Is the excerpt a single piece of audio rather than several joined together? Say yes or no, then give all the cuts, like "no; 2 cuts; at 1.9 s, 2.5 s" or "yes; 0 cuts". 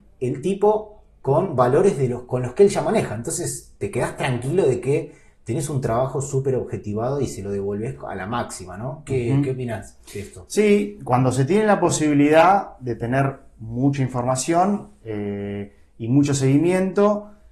yes; 0 cuts